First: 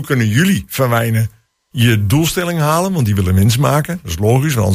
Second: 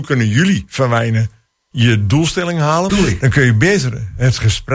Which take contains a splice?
second; 1 cut; at 2.9 s

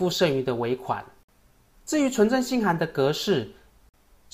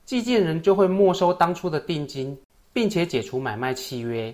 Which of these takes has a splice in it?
first; 1 cut; at 1.7 s

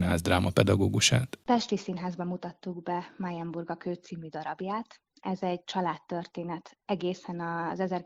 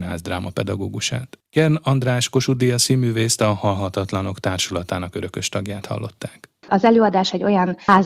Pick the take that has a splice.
second; 2 cuts; at 1.4 s, 6.6 s

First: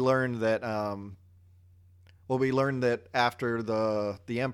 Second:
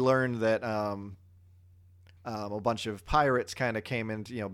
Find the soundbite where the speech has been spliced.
second; 1 cut; at 2.2 s

